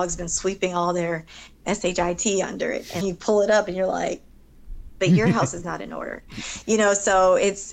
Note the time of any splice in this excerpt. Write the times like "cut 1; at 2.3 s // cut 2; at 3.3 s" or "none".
cut 1; at 1.6 s // cut 2; at 3.0 s